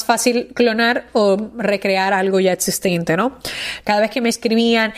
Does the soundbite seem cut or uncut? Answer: cut